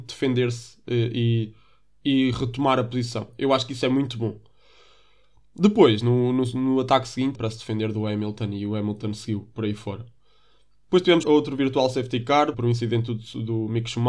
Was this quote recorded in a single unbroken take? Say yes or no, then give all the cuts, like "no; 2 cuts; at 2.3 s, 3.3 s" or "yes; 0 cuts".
no; 3 cuts; at 7.3 s, 11.2 s, 12.5 s